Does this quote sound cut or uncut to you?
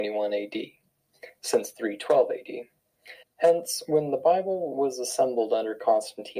cut